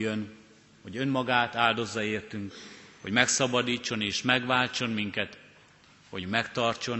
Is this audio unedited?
yes; 0 cuts

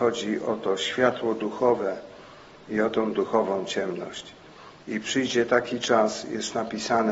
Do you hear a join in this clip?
yes; 1 cut; at 4.8 s

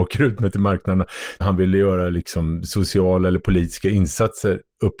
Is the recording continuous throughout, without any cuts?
no; 1 cut; at 1.4 s

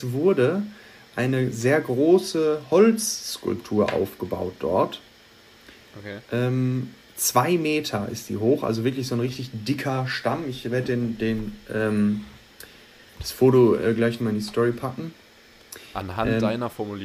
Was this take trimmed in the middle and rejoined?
no; 0 cuts

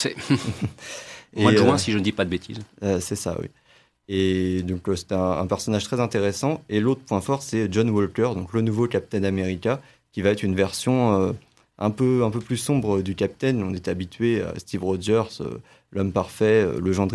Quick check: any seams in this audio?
no; 0 cuts

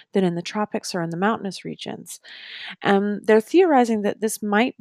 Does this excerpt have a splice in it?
no; 0 cuts

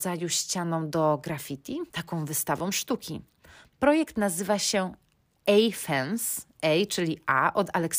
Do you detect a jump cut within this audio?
yes; 1 cut; at 1.9 s

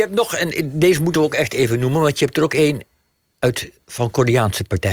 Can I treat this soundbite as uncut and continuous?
yes; 0 cuts

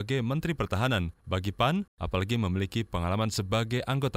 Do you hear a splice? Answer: yes; 1 cut; at 1.9 s

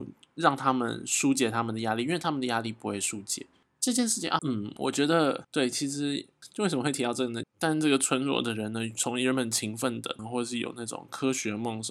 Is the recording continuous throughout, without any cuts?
no; 3 cuts; at 4.4 s, 7.4 s, 10.2 s

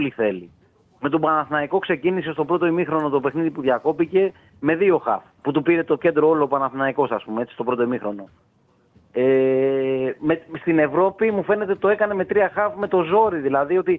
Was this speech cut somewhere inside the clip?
yes; 2 cuts; at 1.0 s, 5.3 s

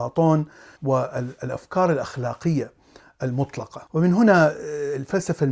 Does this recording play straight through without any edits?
no; 1 cut; at 3.9 s

